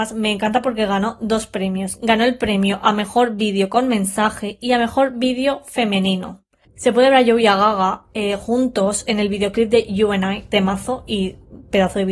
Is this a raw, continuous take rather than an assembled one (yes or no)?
no